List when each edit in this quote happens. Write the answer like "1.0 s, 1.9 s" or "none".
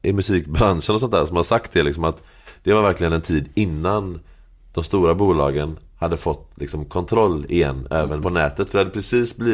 8.2 s